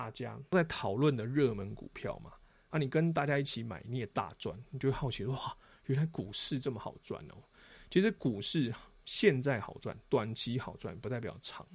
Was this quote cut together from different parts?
no; 0 cuts

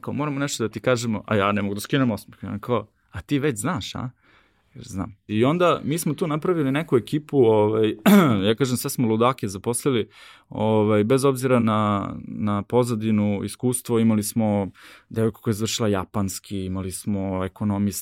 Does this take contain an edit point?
yes; 2 cuts; at 5.3 s, 11.6 s

